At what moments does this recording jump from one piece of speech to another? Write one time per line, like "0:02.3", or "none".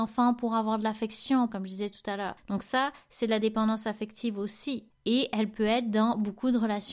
0:01.5